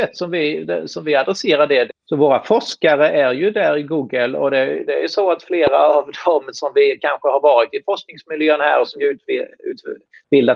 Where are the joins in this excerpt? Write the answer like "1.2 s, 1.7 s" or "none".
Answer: 1.9 s